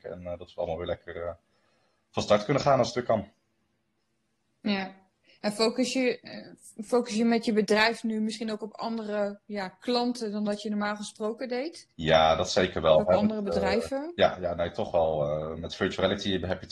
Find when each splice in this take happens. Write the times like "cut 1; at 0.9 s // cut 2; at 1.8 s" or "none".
cut 1; at 11.9 s